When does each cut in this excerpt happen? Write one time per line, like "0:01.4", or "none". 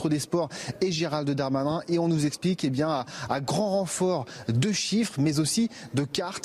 none